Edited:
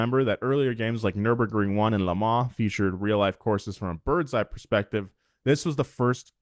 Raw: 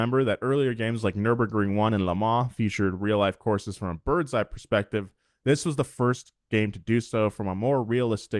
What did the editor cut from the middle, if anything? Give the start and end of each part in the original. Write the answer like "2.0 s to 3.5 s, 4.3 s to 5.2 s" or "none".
none